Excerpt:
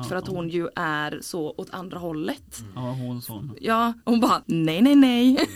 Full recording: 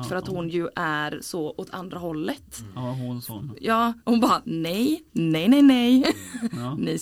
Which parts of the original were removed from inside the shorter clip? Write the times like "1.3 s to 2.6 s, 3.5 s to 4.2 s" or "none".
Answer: 4.4 s to 5.1 s